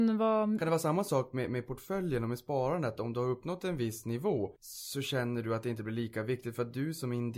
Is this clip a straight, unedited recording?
no; 1 cut; at 4.6 s

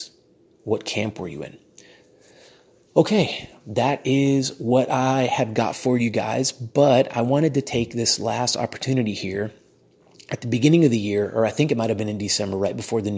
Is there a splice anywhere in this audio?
no; 0 cuts

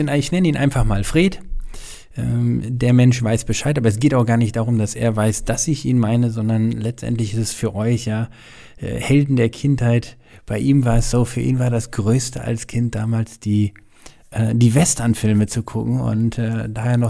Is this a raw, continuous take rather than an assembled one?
yes; 0 cuts

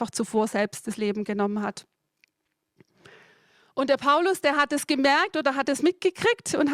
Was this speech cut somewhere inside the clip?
no; 0 cuts

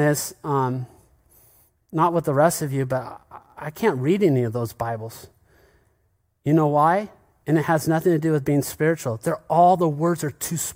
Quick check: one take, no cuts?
yes; 0 cuts

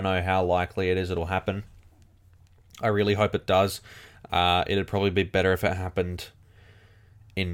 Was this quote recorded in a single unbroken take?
yes; 0 cuts

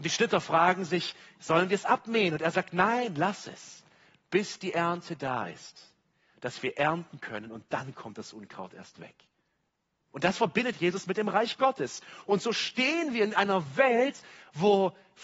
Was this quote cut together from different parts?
no; 0 cuts

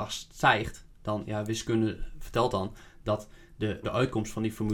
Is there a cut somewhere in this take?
yes; 1 cut; at 3.8 s

